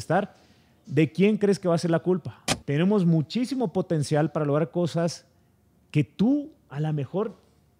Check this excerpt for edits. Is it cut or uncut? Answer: cut